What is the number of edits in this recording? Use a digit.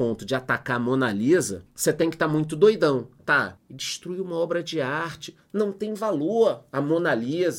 1